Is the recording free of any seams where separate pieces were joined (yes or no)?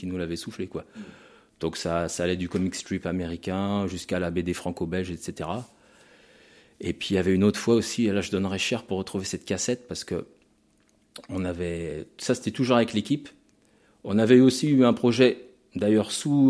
yes